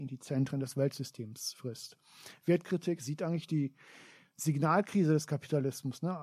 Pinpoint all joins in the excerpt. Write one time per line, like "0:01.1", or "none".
none